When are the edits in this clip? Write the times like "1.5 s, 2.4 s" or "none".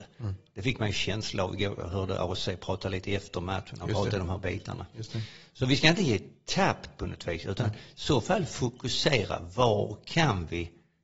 none